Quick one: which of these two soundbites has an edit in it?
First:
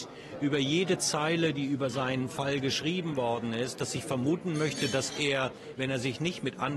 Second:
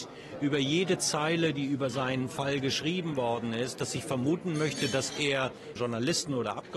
second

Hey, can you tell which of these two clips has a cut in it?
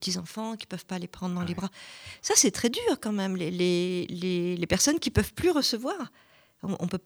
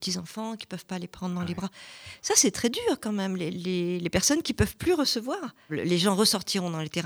second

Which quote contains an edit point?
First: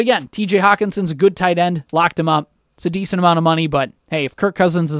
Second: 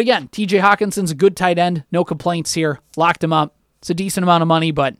first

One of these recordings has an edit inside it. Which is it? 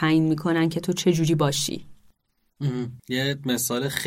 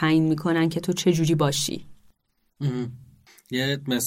first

